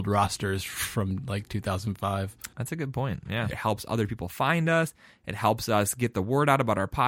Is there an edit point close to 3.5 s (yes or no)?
yes